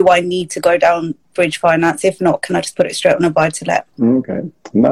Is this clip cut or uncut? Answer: cut